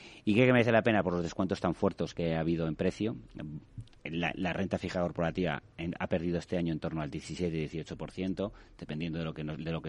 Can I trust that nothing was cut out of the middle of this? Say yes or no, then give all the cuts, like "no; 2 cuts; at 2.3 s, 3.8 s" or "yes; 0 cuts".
yes; 0 cuts